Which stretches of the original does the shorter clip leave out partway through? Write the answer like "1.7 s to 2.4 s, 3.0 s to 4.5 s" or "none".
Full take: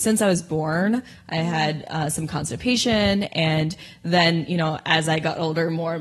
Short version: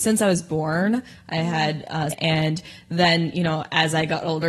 2.1 s to 3.2 s